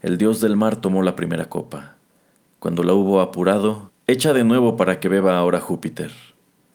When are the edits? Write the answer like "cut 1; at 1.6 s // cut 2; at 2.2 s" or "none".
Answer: cut 1; at 3.9 s